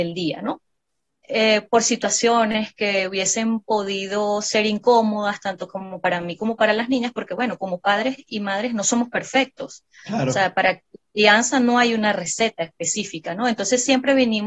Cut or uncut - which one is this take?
uncut